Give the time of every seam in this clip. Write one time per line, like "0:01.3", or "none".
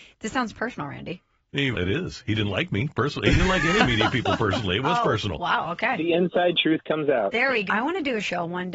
0:01.7
0:07.7